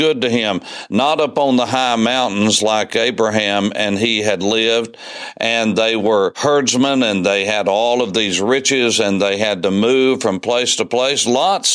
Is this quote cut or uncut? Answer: uncut